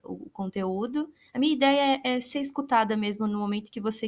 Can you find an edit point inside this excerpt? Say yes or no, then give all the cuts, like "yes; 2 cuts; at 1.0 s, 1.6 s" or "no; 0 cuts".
yes; 1 cut; at 1.3 s